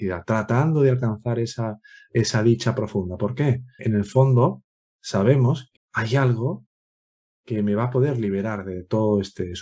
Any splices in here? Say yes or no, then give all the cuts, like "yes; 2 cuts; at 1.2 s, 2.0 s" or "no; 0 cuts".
yes; 2 cuts; at 3.8 s, 5.7 s